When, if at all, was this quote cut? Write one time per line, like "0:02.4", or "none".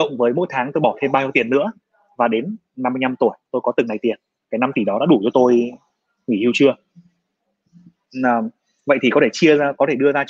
none